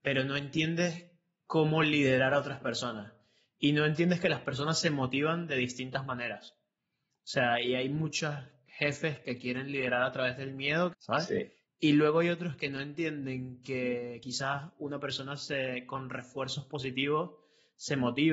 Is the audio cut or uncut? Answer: cut